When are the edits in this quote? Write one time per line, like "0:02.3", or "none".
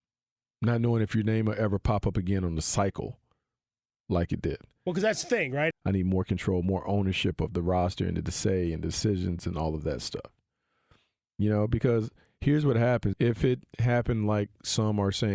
0:05.7
0:13.1